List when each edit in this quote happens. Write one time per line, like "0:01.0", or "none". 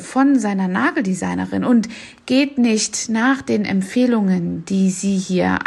none